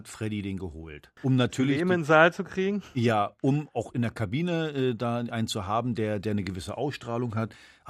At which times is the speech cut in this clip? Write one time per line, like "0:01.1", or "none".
0:01.2